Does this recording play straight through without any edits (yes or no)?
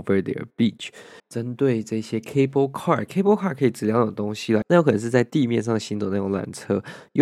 no